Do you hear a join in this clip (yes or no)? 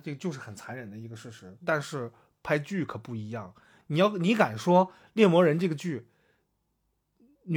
no